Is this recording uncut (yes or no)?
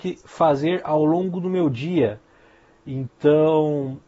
yes